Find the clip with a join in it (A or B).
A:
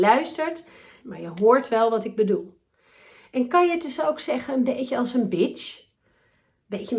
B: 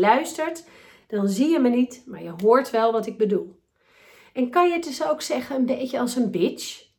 A